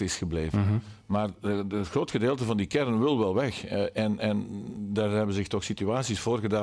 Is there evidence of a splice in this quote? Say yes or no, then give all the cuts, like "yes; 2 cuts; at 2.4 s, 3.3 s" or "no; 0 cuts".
no; 0 cuts